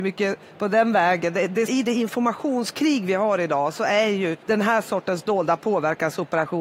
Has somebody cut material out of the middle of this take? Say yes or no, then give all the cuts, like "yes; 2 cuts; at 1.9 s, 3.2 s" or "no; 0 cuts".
yes; 2 cuts; at 1.7 s, 4.4 s